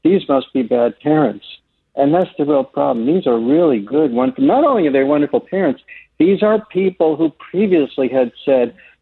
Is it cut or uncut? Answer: uncut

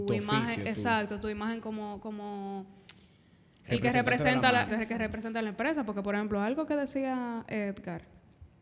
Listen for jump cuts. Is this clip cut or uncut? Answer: cut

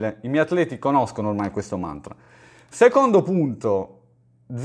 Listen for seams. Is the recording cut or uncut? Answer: uncut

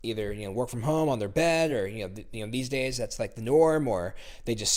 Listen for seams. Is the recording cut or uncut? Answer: uncut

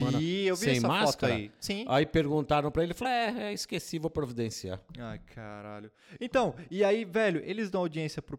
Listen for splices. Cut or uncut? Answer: uncut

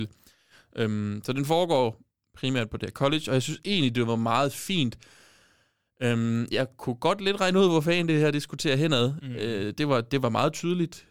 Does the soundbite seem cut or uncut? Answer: uncut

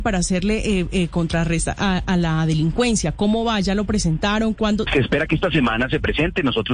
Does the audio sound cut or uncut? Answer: cut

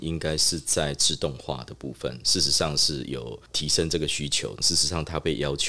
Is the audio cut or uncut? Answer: cut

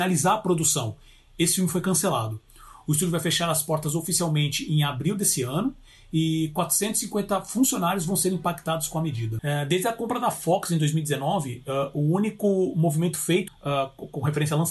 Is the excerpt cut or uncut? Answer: cut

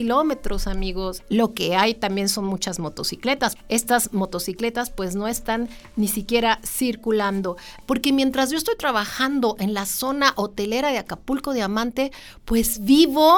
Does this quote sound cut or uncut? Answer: cut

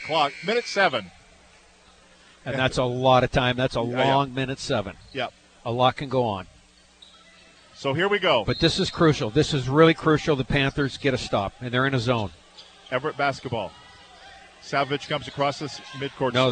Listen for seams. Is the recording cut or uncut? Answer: uncut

